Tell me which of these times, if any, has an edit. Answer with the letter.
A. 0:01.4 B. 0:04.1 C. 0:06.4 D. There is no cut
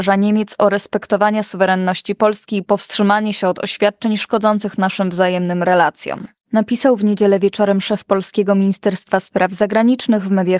D